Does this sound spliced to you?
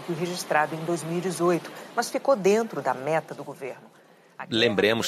no; 0 cuts

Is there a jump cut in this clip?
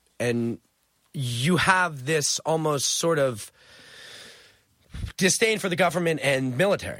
no; 0 cuts

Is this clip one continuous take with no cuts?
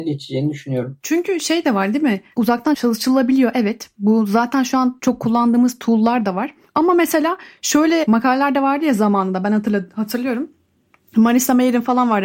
no; 1 cut; at 6.6 s

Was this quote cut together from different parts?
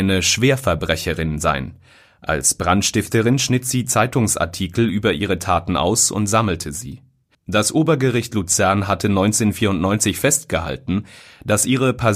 yes; 1 cut; at 7.3 s

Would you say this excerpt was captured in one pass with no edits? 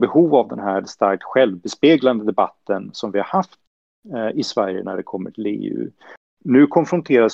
yes; 0 cuts

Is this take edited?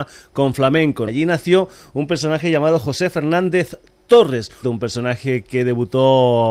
yes; 2 cuts; at 1.1 s, 4.6 s

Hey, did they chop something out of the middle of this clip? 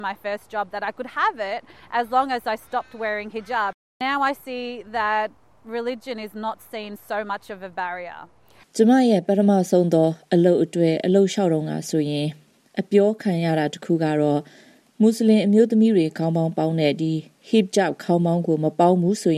yes; 1 cut; at 8.6 s

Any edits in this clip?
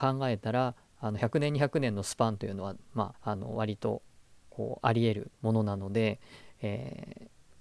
yes; 2 cuts; at 3.1 s, 5.3 s

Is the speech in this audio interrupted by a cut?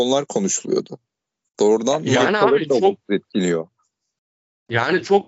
no; 0 cuts

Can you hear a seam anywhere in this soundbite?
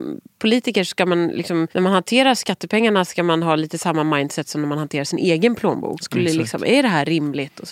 yes; 2 cuts; at 1.7 s, 6.0 s

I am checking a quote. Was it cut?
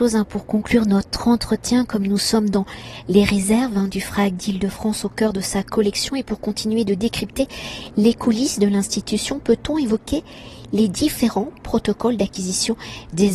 no; 0 cuts

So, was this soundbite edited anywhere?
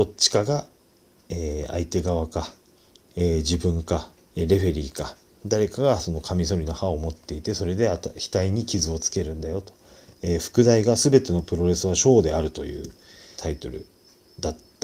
yes; 3 cuts; at 4.3 s, 10.1 s, 13.4 s

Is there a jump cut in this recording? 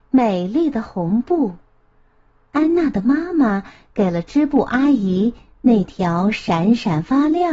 no; 0 cuts

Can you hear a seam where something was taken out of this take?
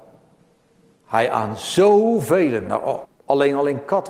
yes; 1 cut; at 3.0 s

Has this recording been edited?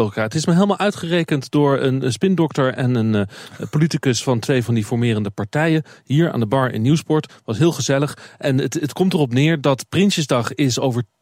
no; 0 cuts

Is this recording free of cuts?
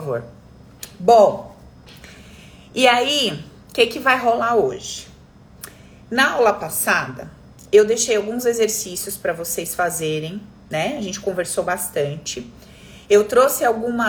yes; 0 cuts

